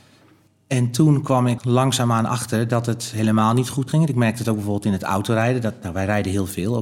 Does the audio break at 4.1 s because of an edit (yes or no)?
no